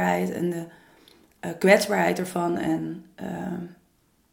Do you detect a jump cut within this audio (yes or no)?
no